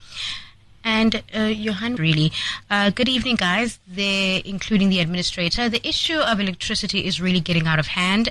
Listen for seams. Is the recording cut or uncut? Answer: cut